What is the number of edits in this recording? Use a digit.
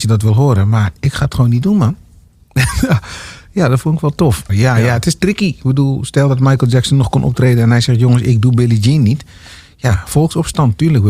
1